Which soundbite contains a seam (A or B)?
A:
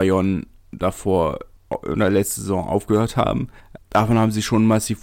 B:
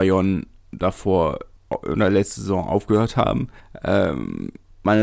A